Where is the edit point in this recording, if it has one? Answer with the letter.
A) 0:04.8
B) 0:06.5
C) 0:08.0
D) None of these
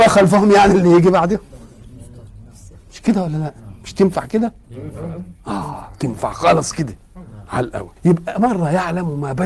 C